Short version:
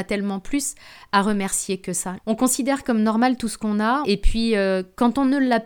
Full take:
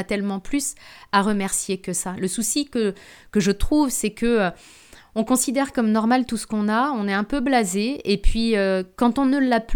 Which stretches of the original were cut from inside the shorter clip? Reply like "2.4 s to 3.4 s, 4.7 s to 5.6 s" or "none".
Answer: 2.1 s to 5.0 s, 6.9 s to 8.0 s